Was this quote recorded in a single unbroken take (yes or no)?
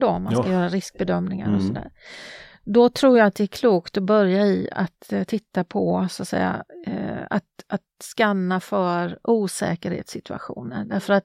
yes